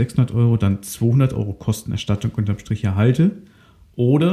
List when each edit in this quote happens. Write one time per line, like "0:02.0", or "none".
none